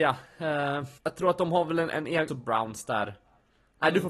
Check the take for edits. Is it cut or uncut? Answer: cut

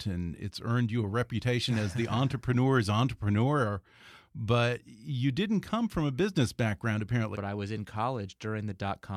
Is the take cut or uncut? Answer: cut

